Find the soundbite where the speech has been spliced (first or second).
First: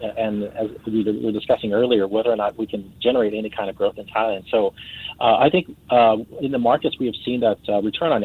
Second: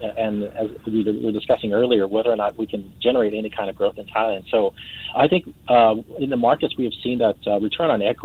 second